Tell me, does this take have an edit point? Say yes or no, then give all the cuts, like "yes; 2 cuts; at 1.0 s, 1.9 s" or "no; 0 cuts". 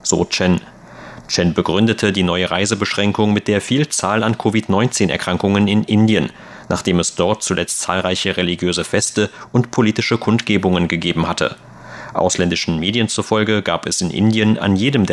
no; 0 cuts